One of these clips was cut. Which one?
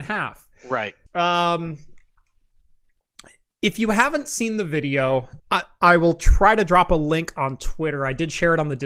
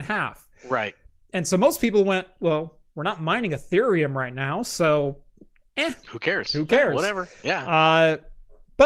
first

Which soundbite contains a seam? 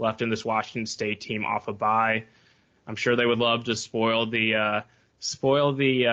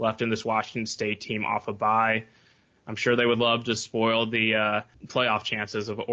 second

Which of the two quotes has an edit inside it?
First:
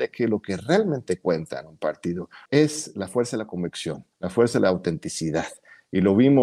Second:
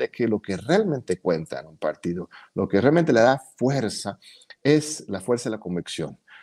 first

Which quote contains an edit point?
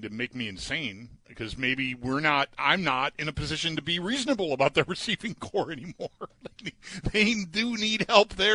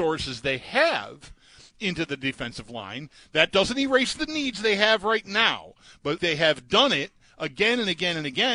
second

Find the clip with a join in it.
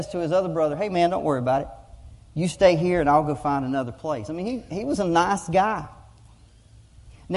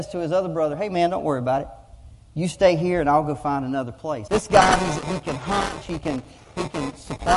second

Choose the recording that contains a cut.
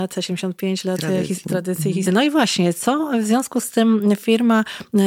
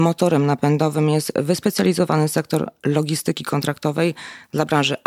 first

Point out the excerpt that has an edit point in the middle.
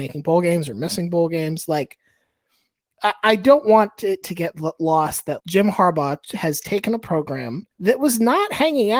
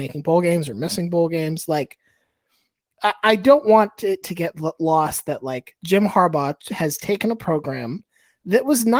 first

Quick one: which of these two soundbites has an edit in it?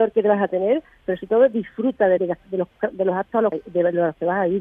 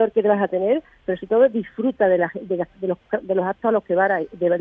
first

